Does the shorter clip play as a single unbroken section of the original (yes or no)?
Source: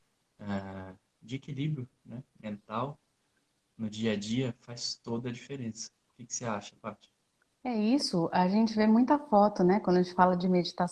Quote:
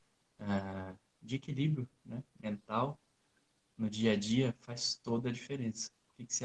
yes